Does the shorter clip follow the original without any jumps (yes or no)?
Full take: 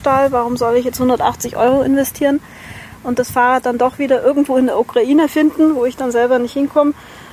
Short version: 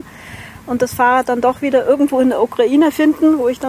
yes